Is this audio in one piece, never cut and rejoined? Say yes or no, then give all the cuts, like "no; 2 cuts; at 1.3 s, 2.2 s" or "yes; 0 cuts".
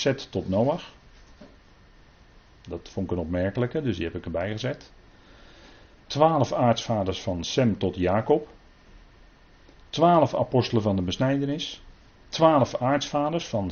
no; 2 cuts; at 9.8 s, 12.1 s